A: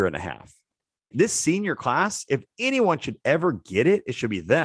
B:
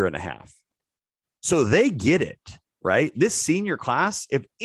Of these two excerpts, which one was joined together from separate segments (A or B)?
A